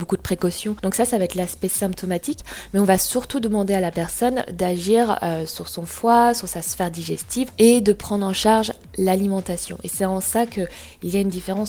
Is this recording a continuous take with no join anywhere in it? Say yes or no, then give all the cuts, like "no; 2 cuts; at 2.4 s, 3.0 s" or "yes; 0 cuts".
yes; 0 cuts